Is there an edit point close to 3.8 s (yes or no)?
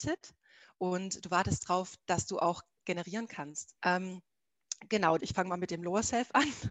yes